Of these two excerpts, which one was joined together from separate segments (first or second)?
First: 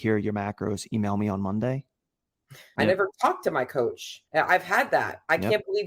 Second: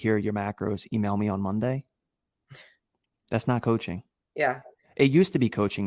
first